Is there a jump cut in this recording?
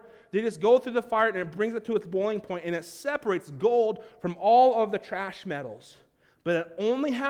no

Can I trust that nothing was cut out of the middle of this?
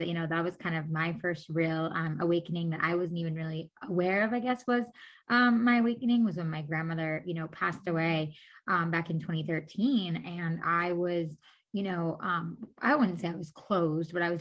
yes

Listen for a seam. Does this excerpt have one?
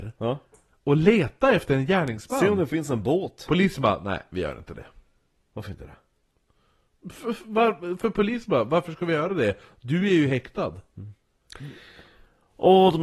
no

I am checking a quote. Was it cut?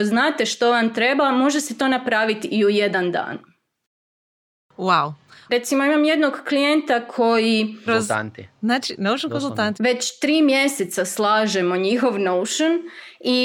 yes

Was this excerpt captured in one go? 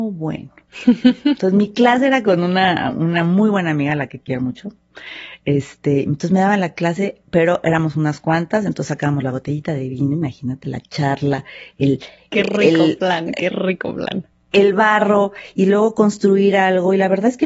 yes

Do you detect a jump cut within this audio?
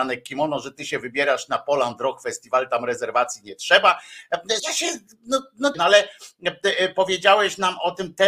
yes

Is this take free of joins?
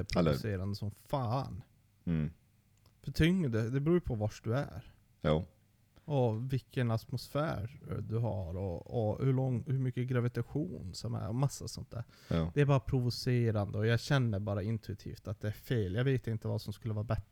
yes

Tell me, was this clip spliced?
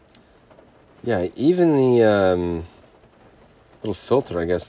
no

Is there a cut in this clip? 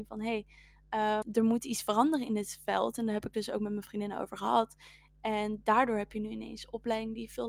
yes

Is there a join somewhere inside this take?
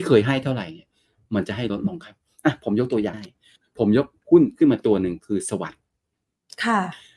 yes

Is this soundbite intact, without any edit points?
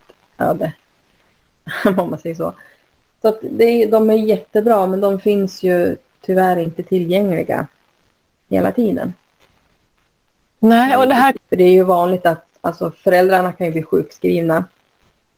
no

